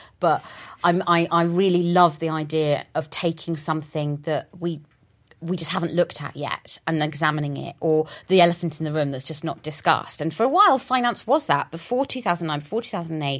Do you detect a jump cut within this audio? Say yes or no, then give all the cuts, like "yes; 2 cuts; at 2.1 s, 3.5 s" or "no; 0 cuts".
no; 0 cuts